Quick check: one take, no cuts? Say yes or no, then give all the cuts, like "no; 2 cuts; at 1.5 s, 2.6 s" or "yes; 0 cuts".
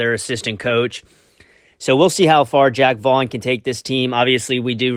yes; 0 cuts